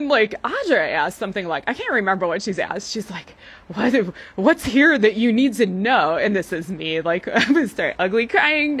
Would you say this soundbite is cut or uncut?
uncut